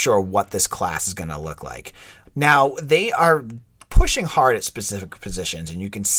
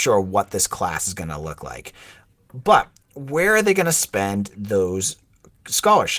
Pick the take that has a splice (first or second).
first